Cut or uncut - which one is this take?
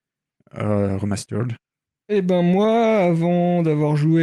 cut